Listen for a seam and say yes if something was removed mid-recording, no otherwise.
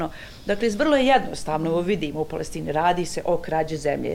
no